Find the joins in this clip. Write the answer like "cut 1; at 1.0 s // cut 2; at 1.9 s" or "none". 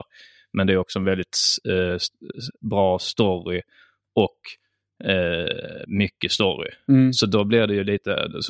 none